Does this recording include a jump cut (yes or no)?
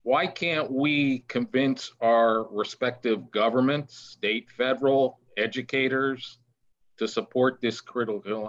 no